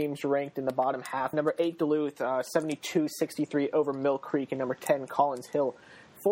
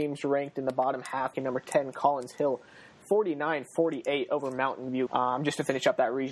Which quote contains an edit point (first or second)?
second